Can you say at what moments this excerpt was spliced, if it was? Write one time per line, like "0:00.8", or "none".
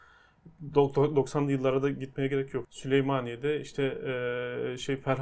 0:02.6